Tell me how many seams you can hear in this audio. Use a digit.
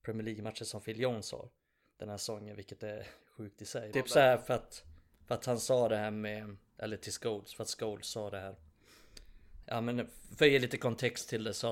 2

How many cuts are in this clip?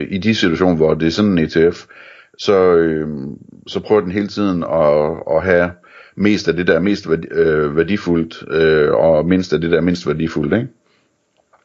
0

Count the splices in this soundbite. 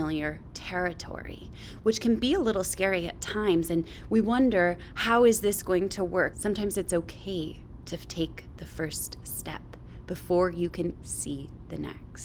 2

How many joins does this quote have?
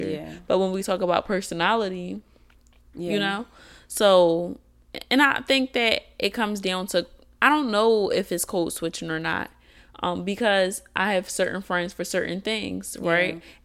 1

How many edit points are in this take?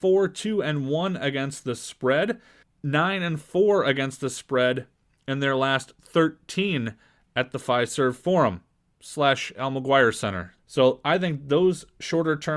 2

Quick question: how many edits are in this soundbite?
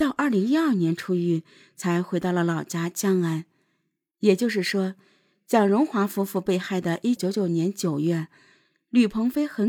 1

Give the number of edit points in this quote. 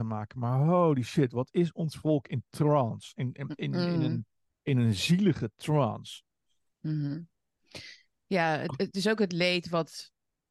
0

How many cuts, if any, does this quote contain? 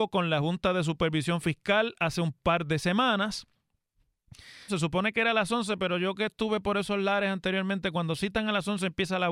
1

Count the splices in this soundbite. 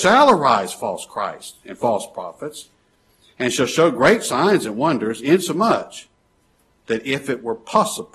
0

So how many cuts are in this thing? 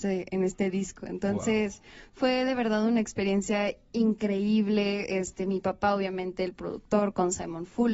0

